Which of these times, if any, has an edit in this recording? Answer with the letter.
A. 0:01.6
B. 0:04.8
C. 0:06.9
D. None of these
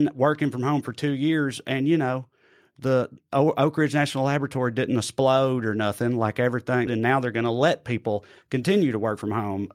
C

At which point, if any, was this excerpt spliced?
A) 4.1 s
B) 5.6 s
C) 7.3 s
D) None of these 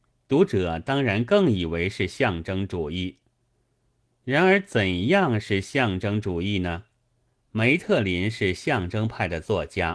C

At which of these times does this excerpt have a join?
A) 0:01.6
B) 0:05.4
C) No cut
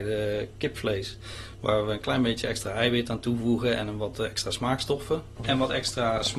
B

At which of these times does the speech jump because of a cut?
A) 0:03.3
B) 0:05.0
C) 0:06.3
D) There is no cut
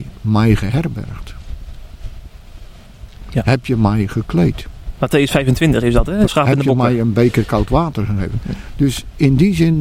C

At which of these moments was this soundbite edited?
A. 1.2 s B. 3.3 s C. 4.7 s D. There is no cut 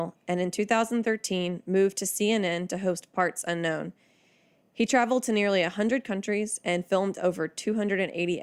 D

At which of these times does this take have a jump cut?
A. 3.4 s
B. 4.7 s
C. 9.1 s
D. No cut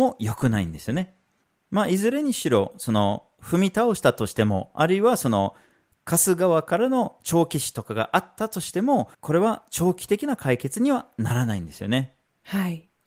C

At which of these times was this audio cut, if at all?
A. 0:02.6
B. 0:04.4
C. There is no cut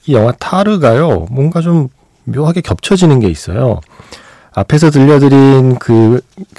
B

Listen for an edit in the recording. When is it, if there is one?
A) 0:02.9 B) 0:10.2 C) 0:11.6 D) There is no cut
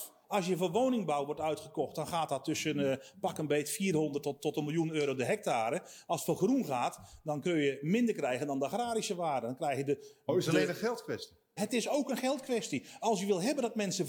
C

